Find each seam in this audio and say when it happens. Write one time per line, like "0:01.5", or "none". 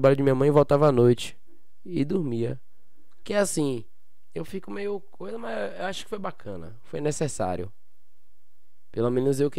0:03.2